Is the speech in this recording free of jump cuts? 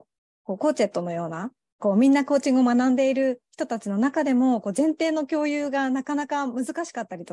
yes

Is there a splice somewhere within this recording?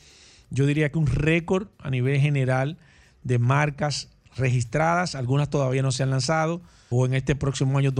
yes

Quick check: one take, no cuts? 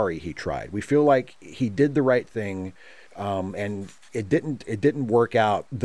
yes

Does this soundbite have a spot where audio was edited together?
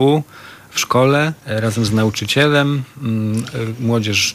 yes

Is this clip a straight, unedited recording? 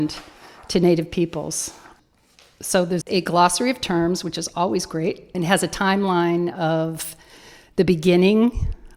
no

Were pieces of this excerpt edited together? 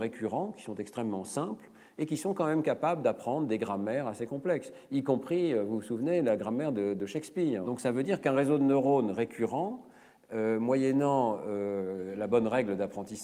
yes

